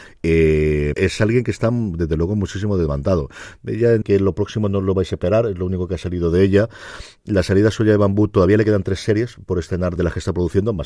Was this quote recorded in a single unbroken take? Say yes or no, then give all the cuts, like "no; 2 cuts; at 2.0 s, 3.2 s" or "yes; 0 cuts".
no; 3 cuts; at 0.9 s, 4.0 s, 10.0 s